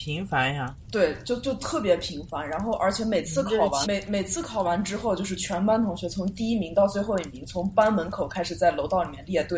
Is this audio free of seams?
no; 1 cut; at 3.8 s

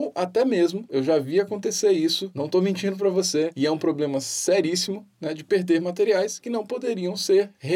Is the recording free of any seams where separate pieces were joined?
yes; 0 cuts

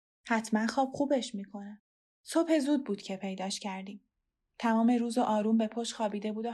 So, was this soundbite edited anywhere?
no; 0 cuts

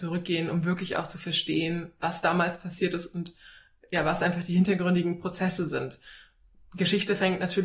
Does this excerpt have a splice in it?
no; 0 cuts

